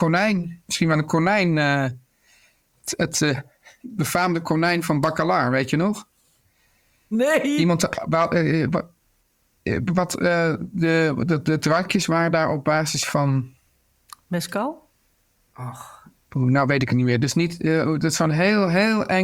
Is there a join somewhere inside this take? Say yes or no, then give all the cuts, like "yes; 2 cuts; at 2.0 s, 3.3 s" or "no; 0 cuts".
no; 0 cuts